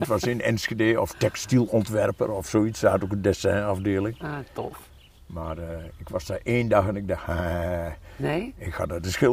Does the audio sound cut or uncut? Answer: uncut